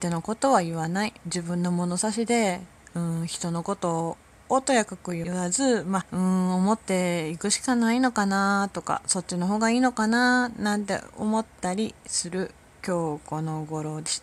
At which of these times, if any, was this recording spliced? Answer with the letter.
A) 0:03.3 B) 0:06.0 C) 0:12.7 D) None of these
B